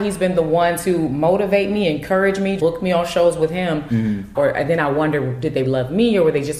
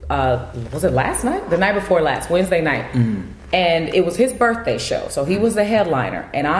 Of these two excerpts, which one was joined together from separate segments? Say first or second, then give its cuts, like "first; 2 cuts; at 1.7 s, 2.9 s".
first; 3 cuts; at 2.6 s, 4.3 s, 5.6 s